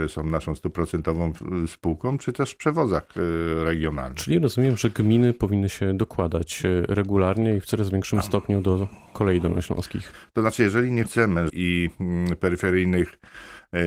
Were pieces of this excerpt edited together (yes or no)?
yes